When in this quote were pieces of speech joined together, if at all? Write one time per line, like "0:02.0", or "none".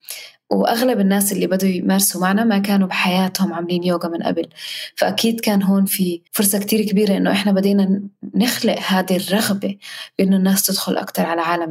0:06.3